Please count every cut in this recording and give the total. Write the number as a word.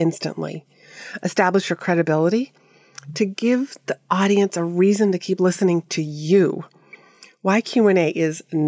zero